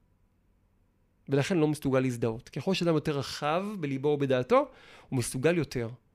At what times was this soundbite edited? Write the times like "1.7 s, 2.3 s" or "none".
none